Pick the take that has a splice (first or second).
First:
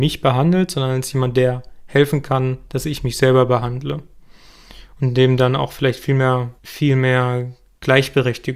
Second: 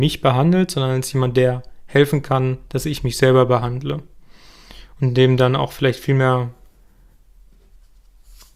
first